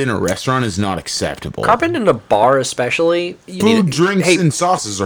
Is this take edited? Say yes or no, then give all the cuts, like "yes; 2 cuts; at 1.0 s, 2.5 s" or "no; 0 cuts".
yes; 1 cut; at 3.6 s